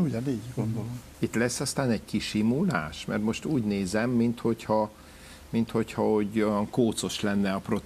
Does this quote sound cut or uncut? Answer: cut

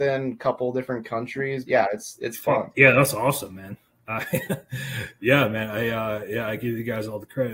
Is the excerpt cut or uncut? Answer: cut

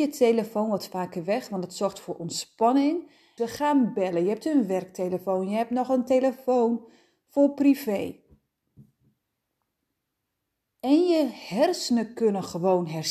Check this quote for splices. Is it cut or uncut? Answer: cut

